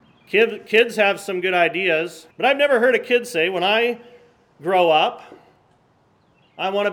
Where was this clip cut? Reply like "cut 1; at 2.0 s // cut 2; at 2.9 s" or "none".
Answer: cut 1; at 2.3 s